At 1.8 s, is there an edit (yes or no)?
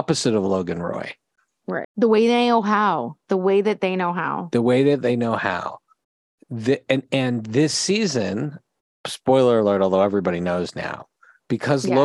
yes